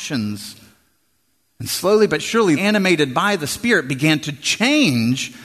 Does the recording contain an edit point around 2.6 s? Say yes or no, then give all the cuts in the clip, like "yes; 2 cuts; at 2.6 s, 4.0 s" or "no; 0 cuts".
yes; 1 cut; at 2.6 s